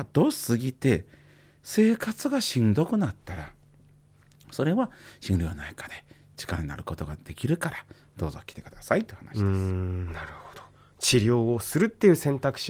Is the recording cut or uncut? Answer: uncut